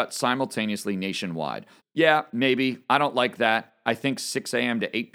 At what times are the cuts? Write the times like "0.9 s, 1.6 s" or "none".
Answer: 1.8 s